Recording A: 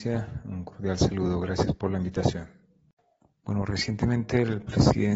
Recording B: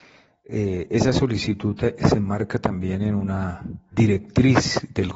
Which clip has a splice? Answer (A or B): B